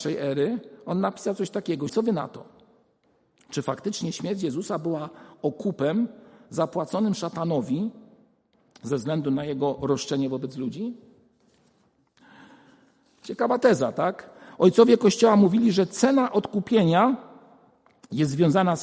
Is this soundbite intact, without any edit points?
no; 1 cut; at 1.9 s

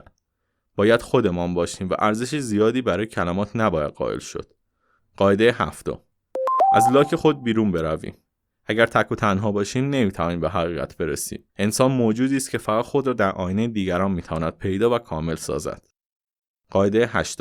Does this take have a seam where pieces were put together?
yes; 2 cuts; at 5.0 s, 11.5 s

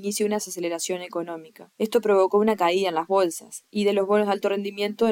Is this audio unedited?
no; 1 cut; at 1.7 s

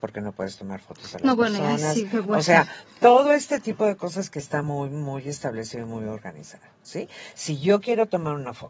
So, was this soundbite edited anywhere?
no; 0 cuts

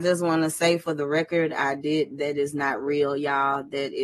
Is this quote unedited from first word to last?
yes; 0 cuts

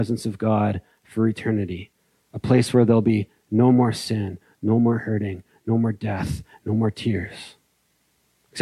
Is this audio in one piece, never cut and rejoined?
yes; 0 cuts

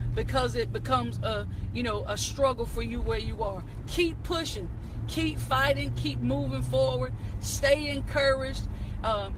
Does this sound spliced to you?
no; 0 cuts

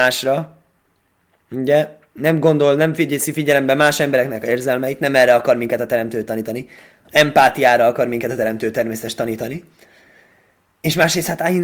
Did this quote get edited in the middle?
no; 0 cuts

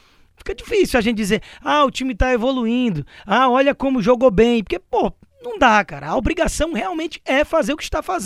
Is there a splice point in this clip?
no; 0 cuts

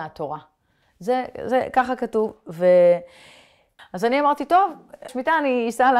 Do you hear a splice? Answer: yes; 2 cuts; at 3.8 s, 5.1 s

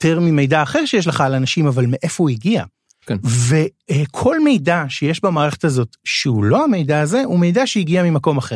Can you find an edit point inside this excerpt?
yes; 1 cut; at 3.0 s

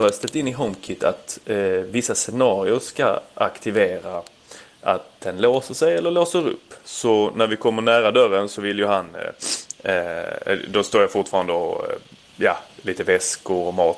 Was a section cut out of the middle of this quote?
yes; 1 cut; at 6.8 s

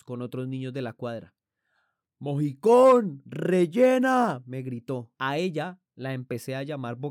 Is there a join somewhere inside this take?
yes; 1 cut; at 5.1 s

